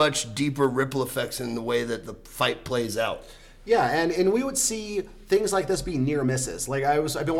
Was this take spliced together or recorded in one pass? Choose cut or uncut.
uncut